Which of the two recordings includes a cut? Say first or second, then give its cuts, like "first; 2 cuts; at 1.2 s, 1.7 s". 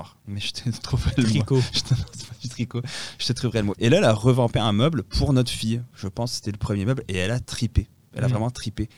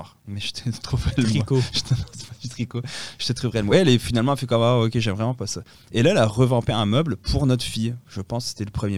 first; 1 cut; at 3.7 s